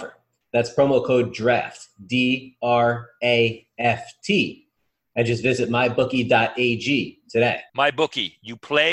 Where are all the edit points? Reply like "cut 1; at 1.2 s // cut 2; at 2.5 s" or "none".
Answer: cut 1; at 7.7 s